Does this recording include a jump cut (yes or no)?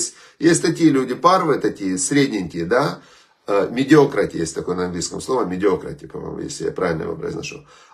no